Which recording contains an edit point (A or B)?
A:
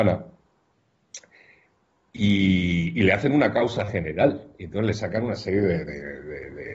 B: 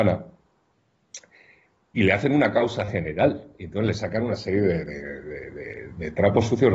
B